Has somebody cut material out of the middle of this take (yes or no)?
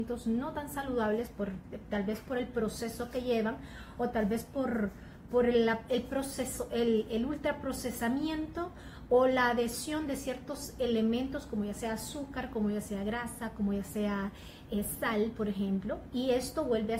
no